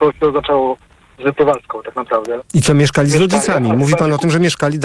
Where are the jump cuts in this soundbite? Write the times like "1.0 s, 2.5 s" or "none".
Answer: 2.4 s